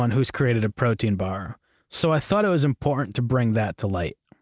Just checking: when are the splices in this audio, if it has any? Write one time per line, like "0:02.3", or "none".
none